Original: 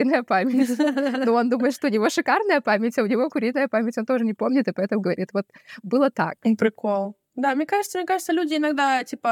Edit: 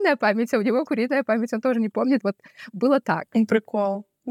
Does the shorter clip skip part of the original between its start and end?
yes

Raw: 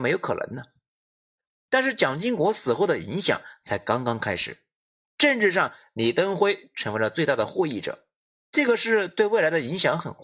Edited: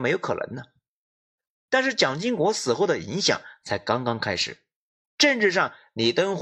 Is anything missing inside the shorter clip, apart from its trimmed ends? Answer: no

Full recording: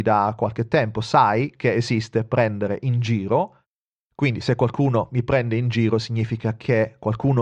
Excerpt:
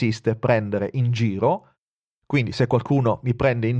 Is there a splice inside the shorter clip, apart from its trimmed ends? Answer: no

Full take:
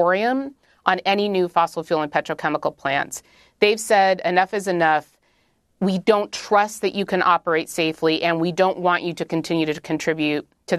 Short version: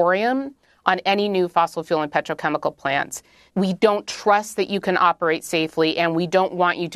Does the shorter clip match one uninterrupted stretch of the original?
no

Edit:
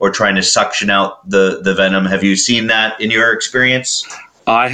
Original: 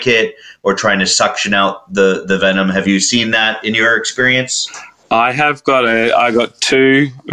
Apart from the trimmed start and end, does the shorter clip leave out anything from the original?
no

